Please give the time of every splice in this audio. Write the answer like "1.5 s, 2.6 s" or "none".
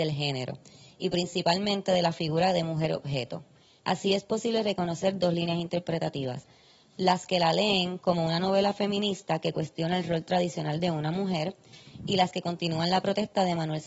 3.8 s